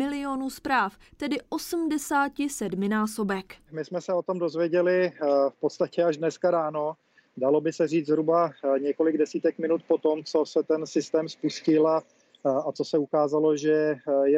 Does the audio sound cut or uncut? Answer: uncut